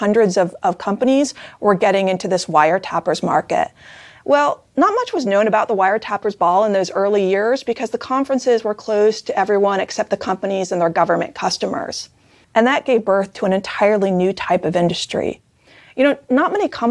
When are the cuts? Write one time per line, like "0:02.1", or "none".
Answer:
0:04.2
0:12.4